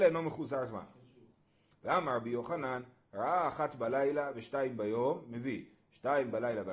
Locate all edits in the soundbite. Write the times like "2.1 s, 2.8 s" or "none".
1.7 s